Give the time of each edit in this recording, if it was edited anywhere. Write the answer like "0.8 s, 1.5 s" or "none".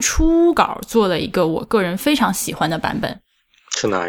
none